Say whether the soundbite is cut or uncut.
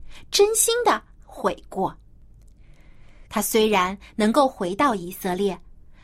cut